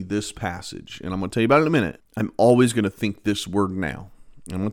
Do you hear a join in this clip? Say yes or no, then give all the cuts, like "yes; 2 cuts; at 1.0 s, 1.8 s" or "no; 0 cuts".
yes; 1 cut; at 2.0 s